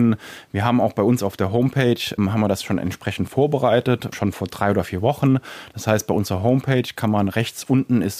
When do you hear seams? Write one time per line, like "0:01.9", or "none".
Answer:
0:04.3